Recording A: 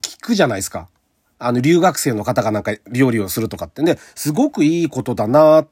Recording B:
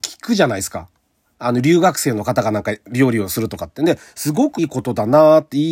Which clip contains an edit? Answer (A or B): B